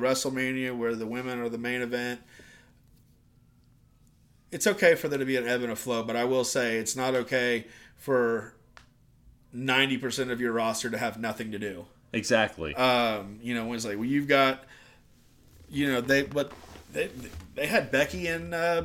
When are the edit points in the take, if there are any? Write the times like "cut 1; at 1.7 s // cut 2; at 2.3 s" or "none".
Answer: cut 1; at 16.0 s

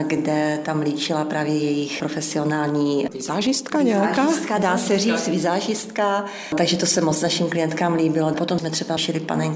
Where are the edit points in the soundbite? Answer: none

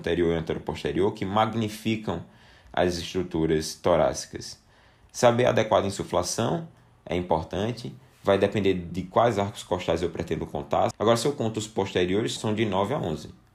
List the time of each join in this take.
cut 1; at 10.9 s // cut 2; at 12.4 s

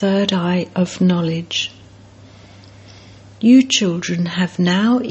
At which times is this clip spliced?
none

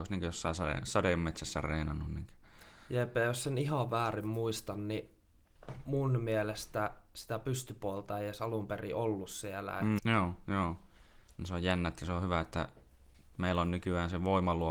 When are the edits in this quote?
cut 1; at 10.0 s

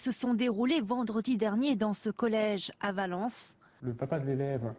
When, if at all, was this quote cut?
cut 1; at 3.8 s

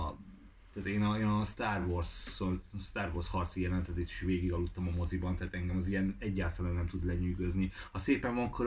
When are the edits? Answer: none

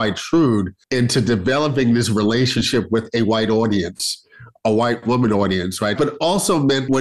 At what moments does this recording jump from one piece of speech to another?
cut 1; at 6.0 s

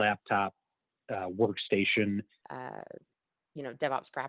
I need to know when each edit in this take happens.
cut 1; at 2.4 s

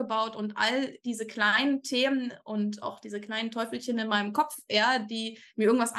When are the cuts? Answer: none

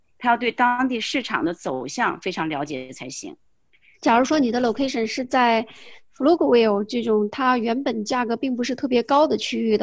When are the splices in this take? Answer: cut 1; at 3.9 s

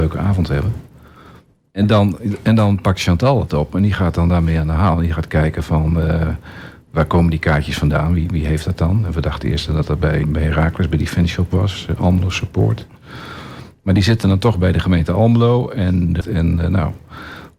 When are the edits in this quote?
cut 1; at 10.2 s // cut 2; at 16.2 s

